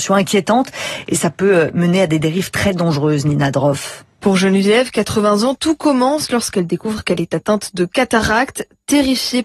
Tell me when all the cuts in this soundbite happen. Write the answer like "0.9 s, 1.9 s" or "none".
none